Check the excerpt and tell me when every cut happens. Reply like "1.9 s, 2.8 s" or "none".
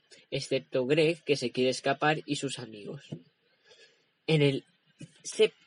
none